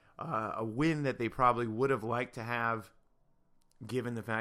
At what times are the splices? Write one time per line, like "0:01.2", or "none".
none